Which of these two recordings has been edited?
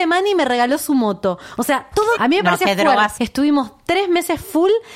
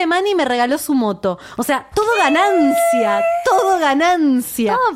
first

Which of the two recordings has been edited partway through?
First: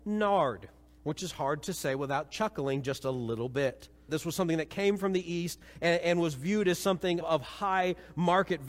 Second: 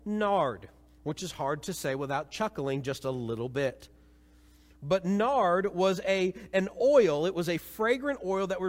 first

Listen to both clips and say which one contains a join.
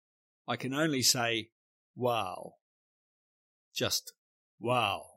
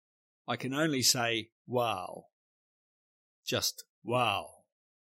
second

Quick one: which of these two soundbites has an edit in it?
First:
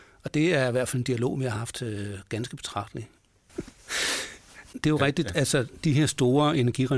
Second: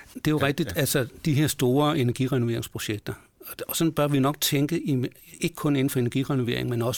first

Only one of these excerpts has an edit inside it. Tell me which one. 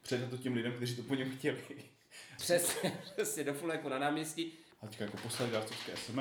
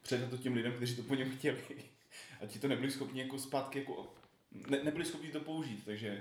first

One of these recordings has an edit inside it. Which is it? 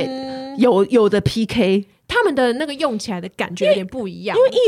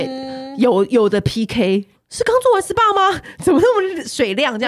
second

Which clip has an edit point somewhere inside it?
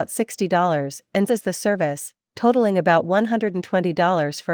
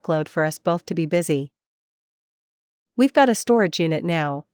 first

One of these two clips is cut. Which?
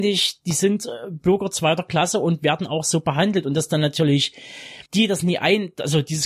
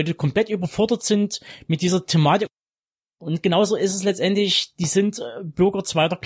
first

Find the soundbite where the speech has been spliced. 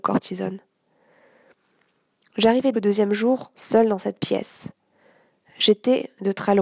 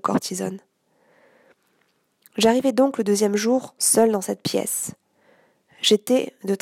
first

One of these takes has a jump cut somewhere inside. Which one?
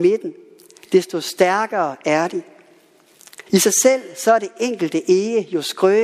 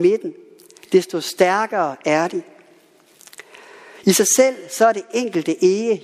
first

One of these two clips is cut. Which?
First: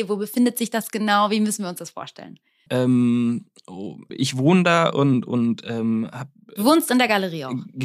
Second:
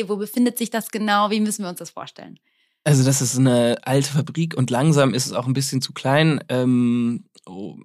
first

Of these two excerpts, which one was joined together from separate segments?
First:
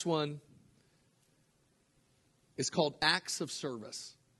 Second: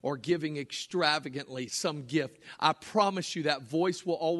second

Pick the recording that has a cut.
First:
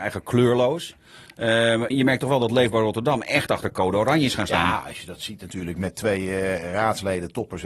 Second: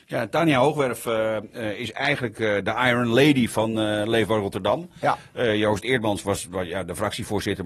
first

